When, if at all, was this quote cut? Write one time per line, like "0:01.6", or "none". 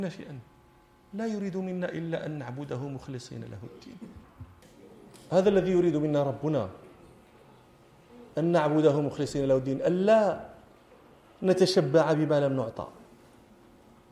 0:04.2